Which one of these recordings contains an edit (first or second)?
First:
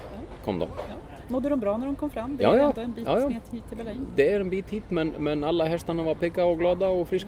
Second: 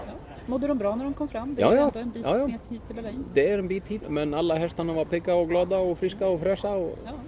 second